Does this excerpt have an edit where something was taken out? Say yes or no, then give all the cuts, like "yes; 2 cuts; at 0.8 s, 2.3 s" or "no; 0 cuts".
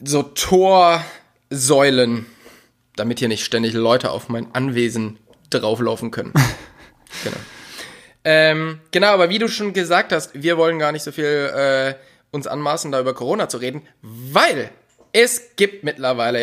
no; 0 cuts